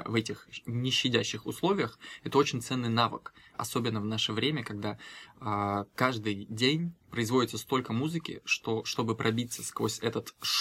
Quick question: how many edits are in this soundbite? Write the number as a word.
two